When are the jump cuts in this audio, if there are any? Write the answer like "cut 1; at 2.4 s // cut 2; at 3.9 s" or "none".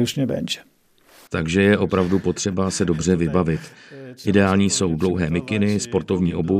cut 1; at 1.3 s